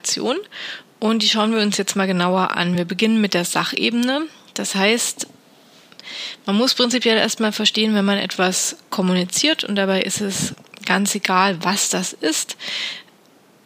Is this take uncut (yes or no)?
yes